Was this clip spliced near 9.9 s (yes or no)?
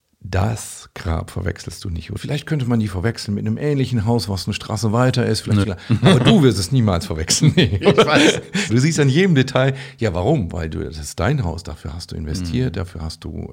no